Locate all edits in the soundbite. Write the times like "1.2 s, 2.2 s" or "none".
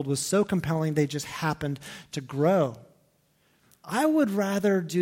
none